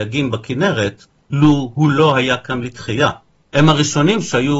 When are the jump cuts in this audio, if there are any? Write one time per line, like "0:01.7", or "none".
0:03.4